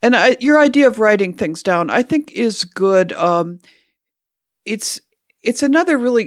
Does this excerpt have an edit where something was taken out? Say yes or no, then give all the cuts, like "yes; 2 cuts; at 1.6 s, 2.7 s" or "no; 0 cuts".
no; 0 cuts